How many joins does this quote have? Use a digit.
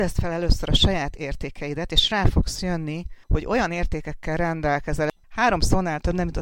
2